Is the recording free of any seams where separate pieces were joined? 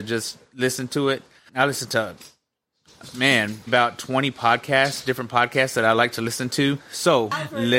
no; 3 cuts; at 1.5 s, 3.7 s, 6.8 s

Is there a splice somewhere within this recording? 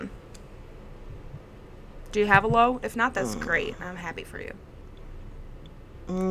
no; 0 cuts

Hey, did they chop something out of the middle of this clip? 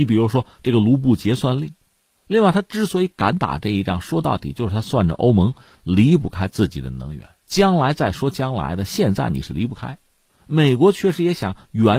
no; 0 cuts

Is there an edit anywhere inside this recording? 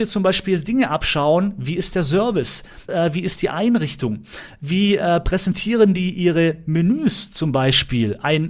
yes; 1 cut; at 2.9 s

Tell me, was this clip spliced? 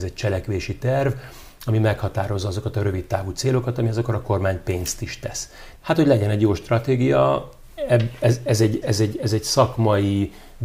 yes; 2 cuts; at 5.8 s, 8.8 s

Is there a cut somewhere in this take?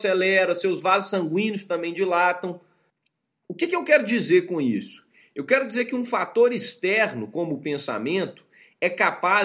no; 0 cuts

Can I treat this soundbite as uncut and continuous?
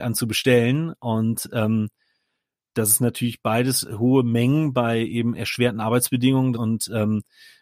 no; 1 cut; at 6.5 s

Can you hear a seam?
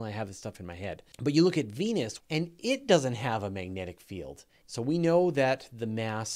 yes; 3 cuts; at 1.1 s, 2.2 s, 4.6 s

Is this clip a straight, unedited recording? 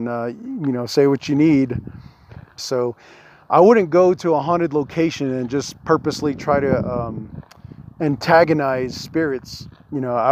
no; 1 cut; at 2.6 s

